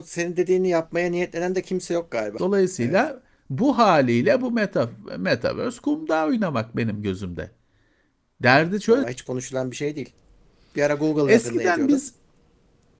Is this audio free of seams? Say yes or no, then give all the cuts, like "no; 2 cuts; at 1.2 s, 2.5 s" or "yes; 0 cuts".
no; 2 cuts; at 2.4 s, 9.0 s